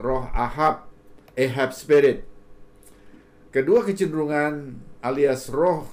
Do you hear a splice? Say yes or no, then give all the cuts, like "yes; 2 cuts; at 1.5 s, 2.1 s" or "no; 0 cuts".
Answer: yes; 1 cut; at 1.3 s